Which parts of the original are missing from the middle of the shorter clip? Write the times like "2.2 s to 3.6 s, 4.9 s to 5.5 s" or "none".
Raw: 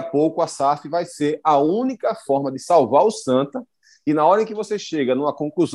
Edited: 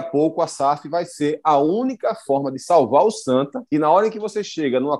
3.7 s to 4.0 s